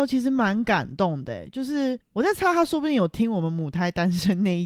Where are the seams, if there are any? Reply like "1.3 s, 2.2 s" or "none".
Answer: 2.0 s